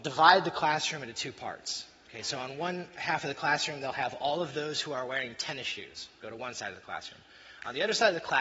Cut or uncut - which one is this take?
uncut